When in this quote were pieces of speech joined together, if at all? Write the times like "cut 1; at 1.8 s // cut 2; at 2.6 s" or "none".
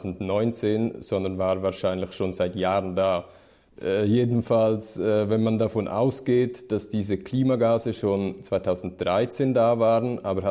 none